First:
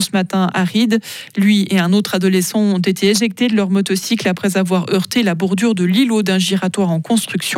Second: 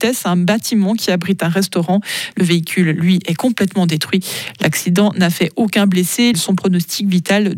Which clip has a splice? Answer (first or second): second